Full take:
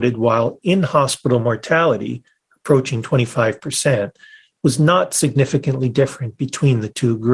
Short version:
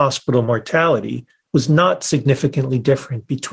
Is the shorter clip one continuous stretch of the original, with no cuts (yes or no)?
no